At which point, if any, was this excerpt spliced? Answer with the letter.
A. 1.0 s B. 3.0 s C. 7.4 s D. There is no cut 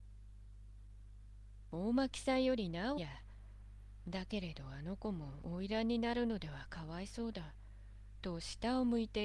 B